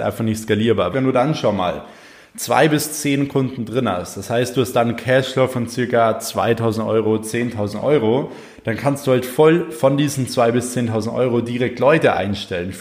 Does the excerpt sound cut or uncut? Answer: cut